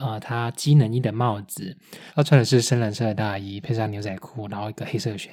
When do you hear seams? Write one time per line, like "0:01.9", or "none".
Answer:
0:02.1